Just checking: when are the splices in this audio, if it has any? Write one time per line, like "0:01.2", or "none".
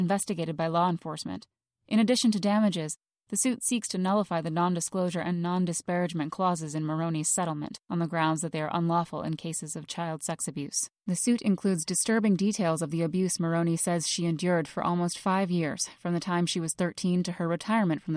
0:07.8
0:11.0